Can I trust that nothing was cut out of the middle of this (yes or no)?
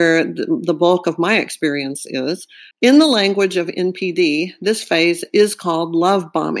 no